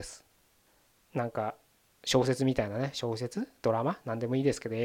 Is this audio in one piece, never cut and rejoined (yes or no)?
no